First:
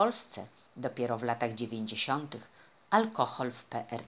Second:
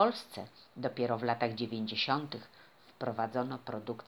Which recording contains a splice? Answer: first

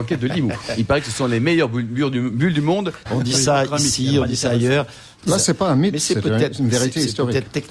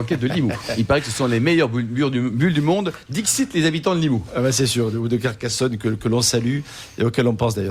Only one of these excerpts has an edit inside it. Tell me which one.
first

